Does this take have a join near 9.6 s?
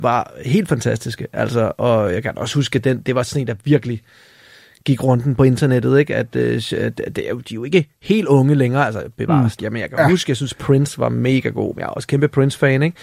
yes; 1 cut; at 9.6 s

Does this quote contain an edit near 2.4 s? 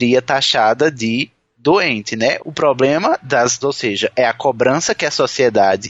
yes; 2 cuts; at 2.4 s, 3.6 s

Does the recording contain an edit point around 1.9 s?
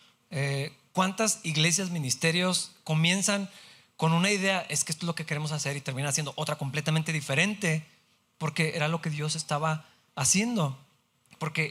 no; 0 cuts

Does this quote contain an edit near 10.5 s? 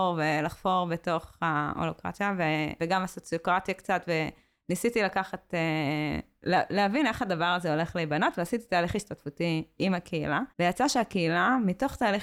yes; 2 cuts; at 2.8 s, 10.5 s

